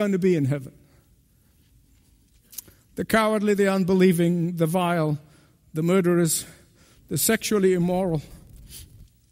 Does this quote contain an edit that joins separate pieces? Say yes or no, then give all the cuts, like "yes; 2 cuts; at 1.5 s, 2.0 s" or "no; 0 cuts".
no; 0 cuts